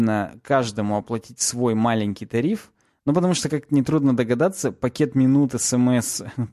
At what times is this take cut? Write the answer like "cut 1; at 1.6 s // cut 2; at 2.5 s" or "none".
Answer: none